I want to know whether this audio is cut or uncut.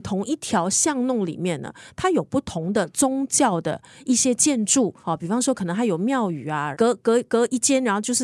cut